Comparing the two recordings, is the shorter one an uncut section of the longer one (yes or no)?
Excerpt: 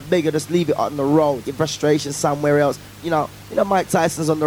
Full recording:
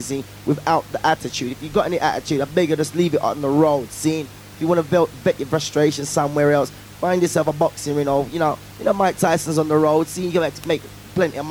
no